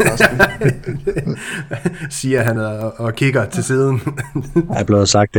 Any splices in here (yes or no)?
no